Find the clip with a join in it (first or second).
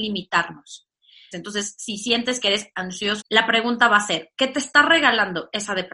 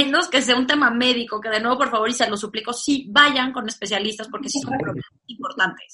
first